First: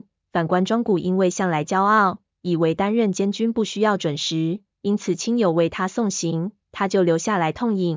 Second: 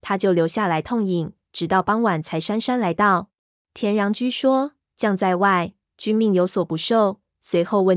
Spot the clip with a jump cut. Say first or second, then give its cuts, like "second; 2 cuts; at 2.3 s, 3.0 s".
second; 1 cut; at 3.6 s